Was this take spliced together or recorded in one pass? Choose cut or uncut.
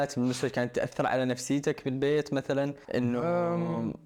cut